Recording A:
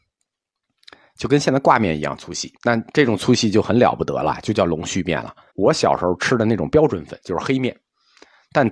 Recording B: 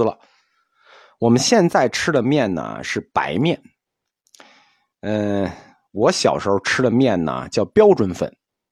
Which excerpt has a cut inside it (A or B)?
A